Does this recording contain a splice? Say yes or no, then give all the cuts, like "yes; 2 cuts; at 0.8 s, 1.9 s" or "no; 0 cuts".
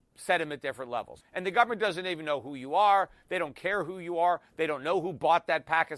yes; 1 cut; at 1.2 s